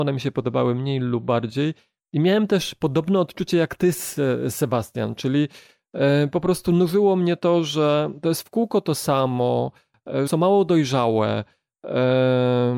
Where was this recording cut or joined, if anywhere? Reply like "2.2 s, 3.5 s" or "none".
10.3 s